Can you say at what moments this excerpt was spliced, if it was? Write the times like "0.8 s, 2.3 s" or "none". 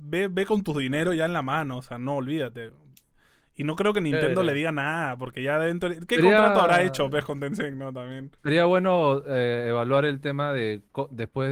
8.4 s